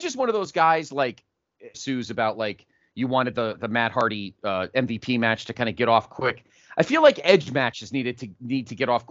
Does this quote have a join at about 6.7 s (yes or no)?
no